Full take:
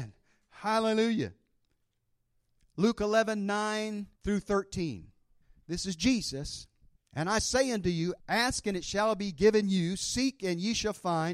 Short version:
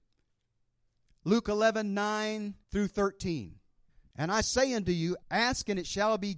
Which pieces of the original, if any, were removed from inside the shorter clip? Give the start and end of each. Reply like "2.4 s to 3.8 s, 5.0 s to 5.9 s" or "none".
5.6 s to 7.1 s